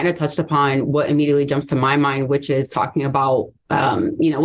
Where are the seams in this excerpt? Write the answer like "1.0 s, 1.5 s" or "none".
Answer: none